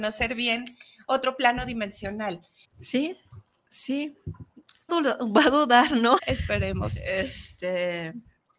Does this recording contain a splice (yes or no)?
yes